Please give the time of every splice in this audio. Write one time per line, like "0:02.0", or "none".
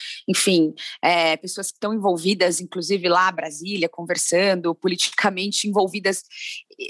none